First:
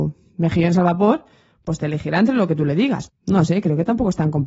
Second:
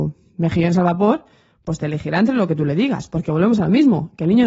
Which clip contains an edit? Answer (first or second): first